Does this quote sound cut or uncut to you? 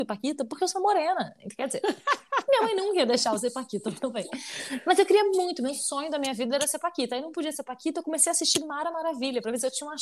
uncut